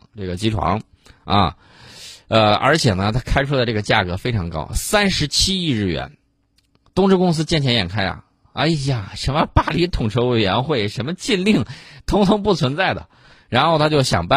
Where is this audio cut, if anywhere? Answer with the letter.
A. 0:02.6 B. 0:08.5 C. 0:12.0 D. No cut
D